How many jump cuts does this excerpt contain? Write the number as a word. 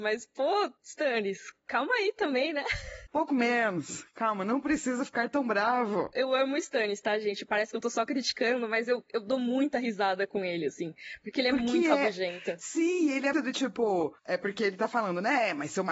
one